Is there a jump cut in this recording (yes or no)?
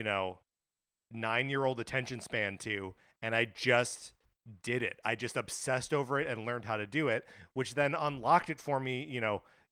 no